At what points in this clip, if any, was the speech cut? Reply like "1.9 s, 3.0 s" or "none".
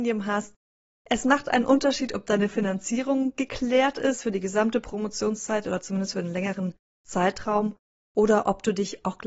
0.9 s